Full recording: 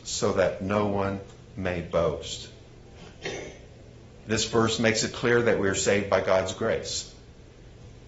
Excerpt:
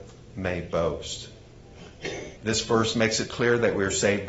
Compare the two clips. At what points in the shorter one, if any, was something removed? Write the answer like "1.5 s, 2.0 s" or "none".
2.4 s